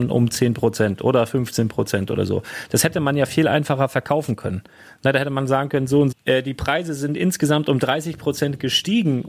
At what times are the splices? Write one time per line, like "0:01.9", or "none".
0:06.1